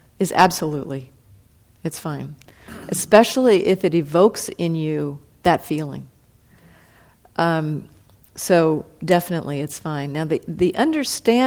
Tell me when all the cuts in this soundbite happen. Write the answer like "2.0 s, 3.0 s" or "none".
none